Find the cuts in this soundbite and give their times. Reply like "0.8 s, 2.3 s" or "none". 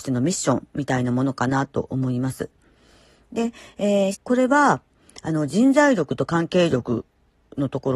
4.1 s